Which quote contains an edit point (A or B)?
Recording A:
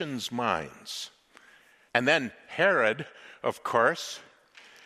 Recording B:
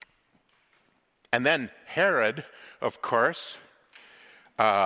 A